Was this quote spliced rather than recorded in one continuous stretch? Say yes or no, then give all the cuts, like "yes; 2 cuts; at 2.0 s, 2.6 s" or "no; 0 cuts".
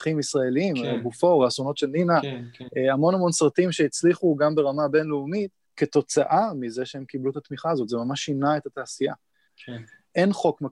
yes; 2 cuts; at 5.7 s, 9.5 s